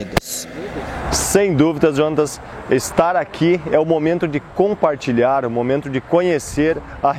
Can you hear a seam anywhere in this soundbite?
no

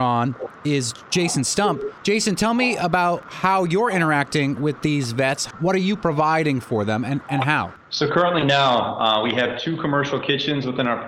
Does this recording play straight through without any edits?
yes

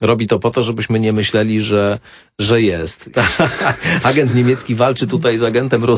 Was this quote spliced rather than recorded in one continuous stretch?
yes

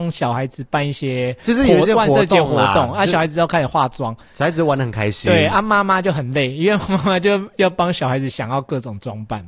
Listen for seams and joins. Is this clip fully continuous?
yes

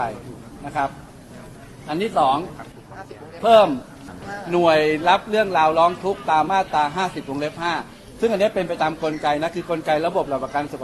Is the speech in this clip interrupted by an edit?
yes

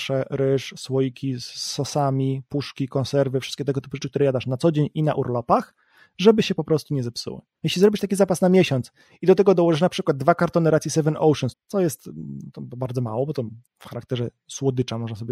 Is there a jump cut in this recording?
yes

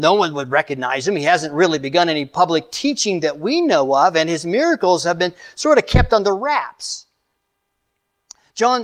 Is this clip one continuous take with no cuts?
yes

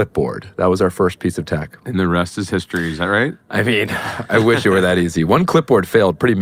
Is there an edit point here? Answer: no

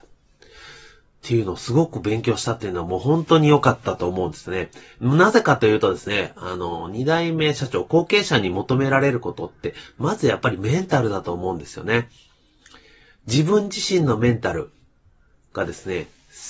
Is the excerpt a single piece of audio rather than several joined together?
yes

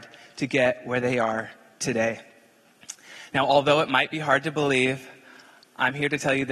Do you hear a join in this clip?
no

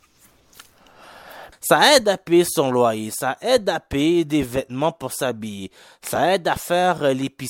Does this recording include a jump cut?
yes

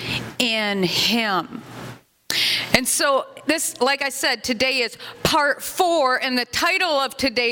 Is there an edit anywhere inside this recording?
no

